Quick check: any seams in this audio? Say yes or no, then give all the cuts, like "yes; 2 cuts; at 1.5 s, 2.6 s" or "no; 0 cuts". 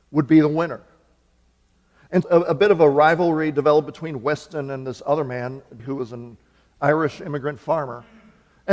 yes; 2 cuts; at 2.2 s, 5.8 s